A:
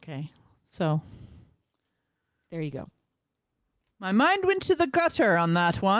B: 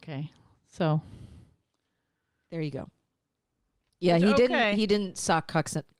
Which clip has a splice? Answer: B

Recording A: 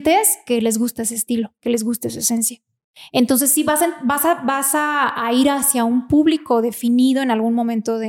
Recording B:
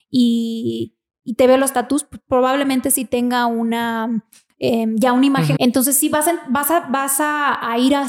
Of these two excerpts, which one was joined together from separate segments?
B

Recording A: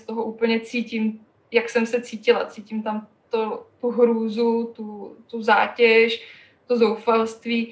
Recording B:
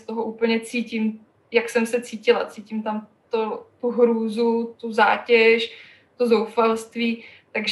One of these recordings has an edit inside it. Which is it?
B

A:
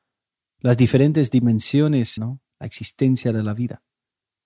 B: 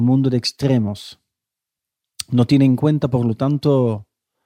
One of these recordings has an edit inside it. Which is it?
A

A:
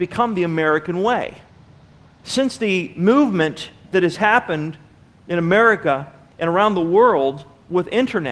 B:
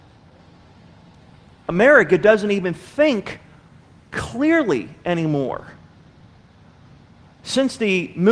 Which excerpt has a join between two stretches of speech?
A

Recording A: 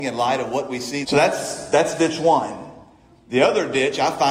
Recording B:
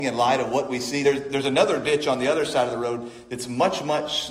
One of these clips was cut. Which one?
A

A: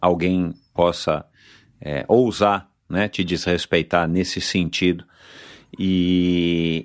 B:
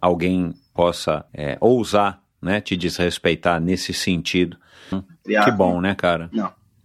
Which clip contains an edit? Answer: B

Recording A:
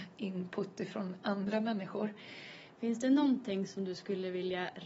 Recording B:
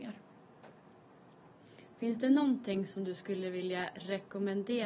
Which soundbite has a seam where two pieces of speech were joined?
A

